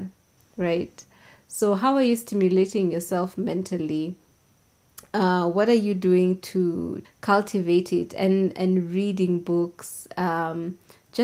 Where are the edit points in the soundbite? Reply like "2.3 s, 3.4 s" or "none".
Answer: 7.0 s

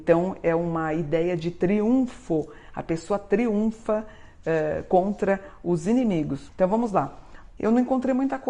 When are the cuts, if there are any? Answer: 6.5 s, 7.6 s

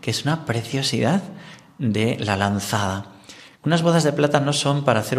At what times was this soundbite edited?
3.6 s

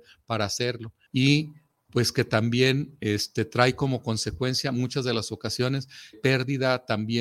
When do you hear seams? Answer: 1.1 s, 6.1 s

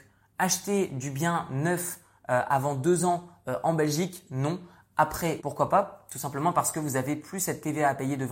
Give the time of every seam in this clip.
5.4 s

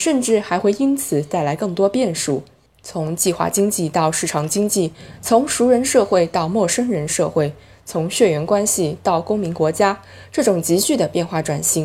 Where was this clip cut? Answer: 2.7 s

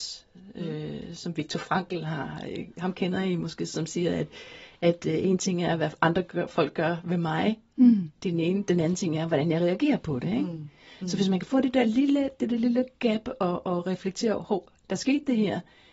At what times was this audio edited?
none

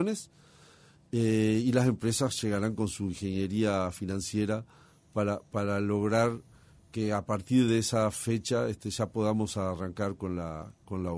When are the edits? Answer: none

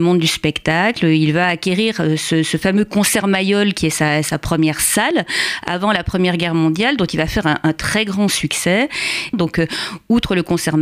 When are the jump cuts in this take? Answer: 9.3 s

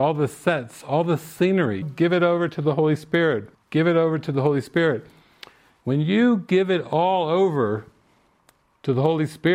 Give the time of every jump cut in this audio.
1.8 s, 3.5 s

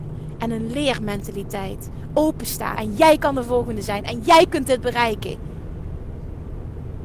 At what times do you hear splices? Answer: 2.8 s

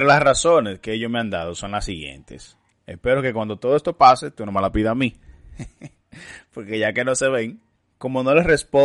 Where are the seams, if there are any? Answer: 2.7 s

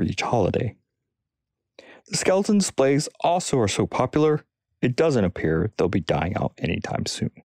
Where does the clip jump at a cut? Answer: none

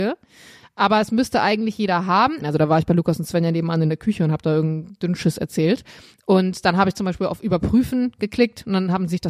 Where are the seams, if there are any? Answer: 2.4 s

